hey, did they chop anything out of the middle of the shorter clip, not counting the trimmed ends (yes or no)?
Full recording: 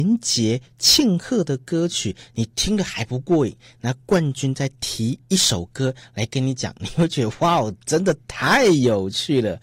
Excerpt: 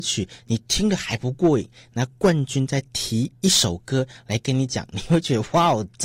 no